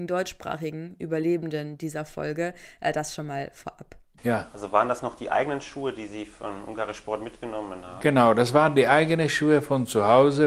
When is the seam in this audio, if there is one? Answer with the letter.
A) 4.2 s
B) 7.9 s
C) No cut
A